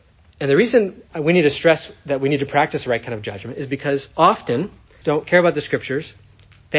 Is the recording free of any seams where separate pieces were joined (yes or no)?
no